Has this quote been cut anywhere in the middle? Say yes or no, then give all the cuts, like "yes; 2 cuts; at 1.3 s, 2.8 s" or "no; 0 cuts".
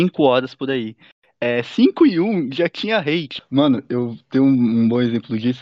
yes; 1 cut; at 3.4 s